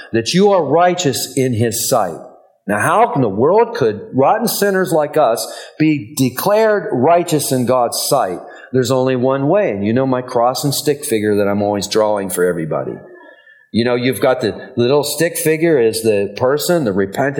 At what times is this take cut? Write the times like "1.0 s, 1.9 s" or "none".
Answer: none